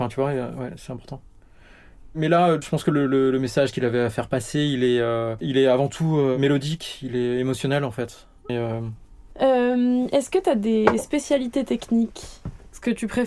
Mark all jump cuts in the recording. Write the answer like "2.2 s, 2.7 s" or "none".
8.5 s

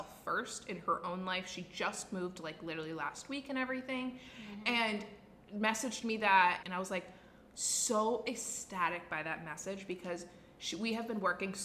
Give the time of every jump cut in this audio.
6.6 s

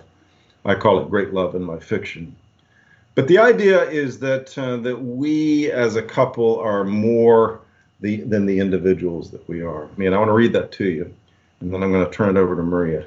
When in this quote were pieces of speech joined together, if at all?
10.0 s

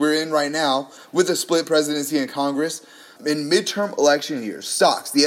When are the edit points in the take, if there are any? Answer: 3.2 s

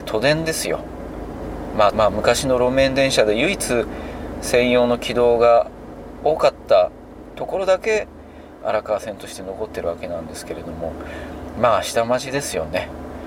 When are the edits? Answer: 1.9 s

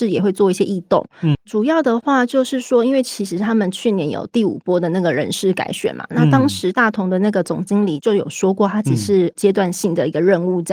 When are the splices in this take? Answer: 1.3 s

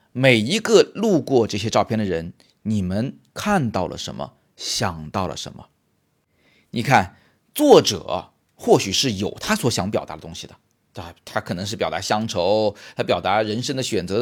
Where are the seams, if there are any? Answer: none

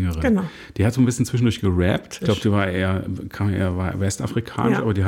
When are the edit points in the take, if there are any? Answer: 2.2 s

